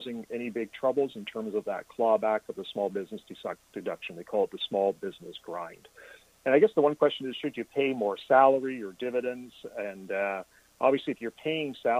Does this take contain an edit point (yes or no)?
no